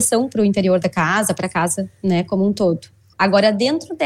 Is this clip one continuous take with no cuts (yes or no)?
no